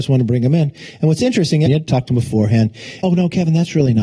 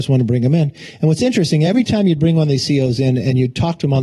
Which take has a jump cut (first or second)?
first